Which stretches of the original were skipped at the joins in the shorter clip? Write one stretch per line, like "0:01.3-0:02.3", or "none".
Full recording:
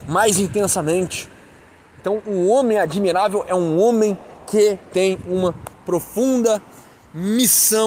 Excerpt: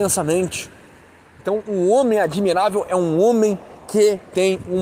none